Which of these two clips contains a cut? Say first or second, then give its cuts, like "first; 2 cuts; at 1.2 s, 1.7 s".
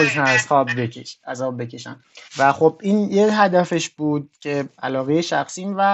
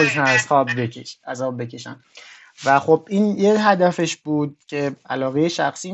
first; 1 cut; at 2.3 s